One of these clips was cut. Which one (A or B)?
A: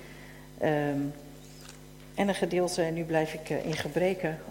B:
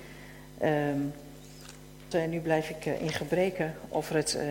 B